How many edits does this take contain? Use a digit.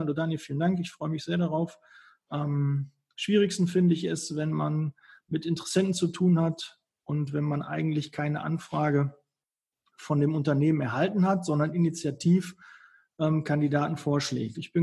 0